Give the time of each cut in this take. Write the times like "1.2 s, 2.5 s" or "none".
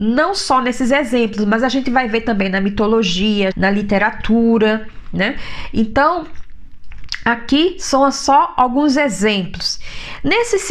3.5 s

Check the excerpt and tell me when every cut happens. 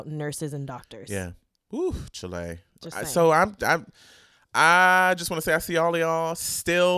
none

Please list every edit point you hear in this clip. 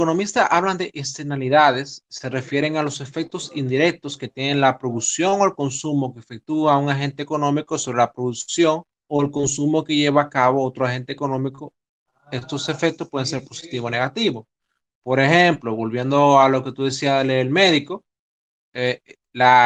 none

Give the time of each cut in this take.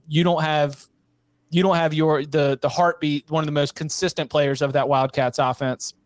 none

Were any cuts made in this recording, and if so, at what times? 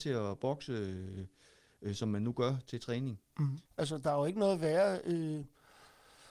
3.7 s

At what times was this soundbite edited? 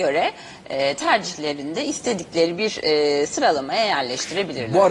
none

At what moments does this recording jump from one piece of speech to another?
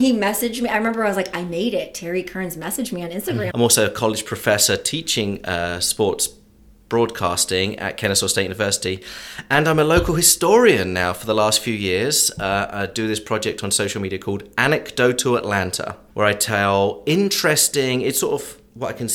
3.5 s

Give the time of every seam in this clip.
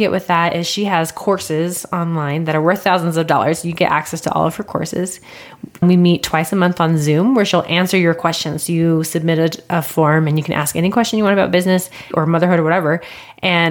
none

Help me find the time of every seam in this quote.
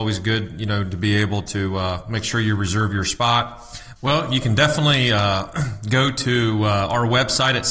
4.0 s

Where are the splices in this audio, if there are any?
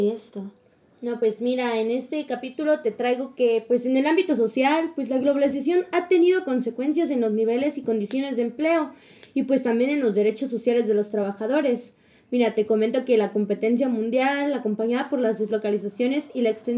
none

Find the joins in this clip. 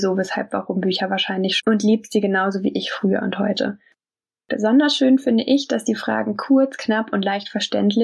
1.6 s, 4.4 s

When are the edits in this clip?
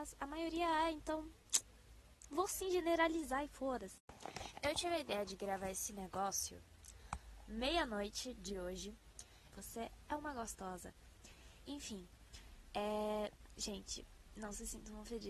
9.5 s

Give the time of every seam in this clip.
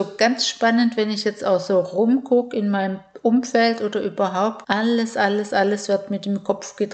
4.6 s

